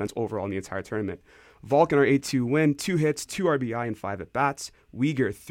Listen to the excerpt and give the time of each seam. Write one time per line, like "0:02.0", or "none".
0:03.2